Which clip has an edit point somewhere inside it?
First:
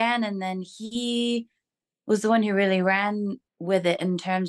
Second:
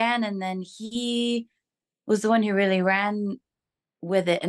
first; 1 cut; at 3.5 s

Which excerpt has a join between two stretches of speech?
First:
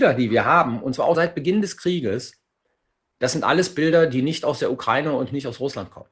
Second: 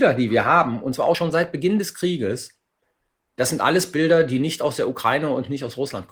first; 1 cut; at 1.1 s

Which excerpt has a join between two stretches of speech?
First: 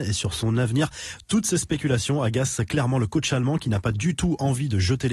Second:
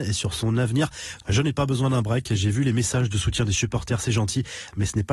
second; 1 cut; at 1.2 s

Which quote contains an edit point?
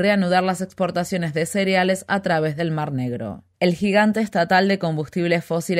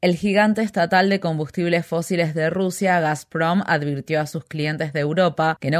first; 1 cut; at 3.5 s

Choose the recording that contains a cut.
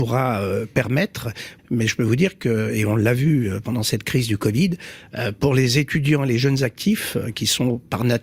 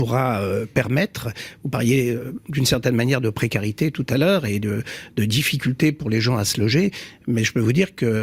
first; 1 cut; at 1.6 s

